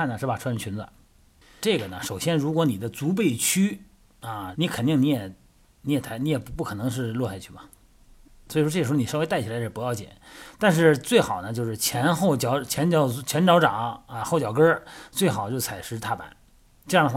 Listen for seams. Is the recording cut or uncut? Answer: cut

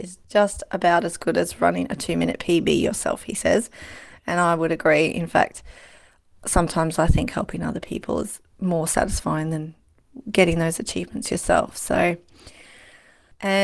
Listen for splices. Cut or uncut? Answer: uncut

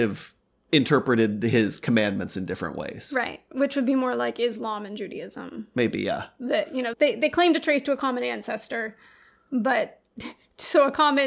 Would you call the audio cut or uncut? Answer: cut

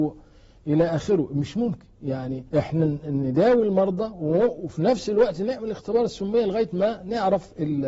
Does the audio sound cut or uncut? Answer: cut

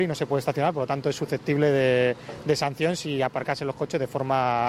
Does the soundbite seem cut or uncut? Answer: uncut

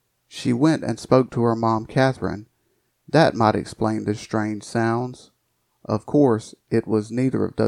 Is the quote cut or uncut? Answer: cut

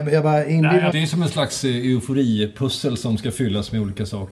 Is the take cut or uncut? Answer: cut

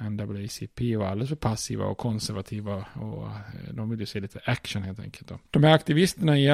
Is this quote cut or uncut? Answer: cut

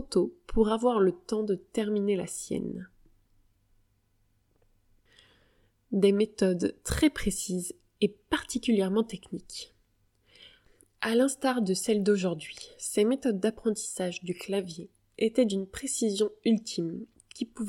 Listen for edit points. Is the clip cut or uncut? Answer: uncut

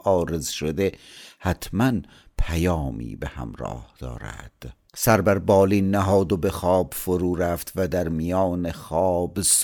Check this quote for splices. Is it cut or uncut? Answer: cut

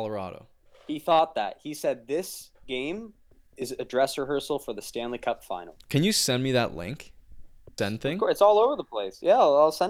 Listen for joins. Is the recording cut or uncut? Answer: cut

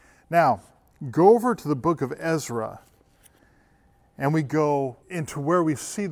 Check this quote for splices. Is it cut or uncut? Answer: cut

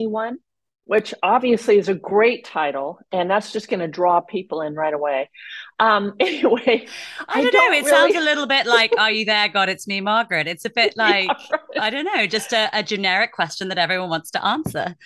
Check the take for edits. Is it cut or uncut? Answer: uncut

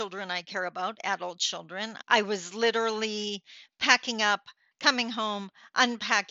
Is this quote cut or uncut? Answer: cut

